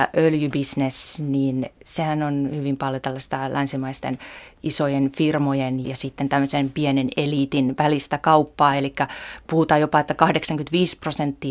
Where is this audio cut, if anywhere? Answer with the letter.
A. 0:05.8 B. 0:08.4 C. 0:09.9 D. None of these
A